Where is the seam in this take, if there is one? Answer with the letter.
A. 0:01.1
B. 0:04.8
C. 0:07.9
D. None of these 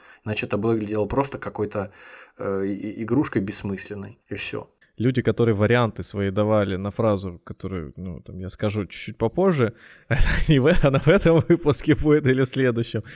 B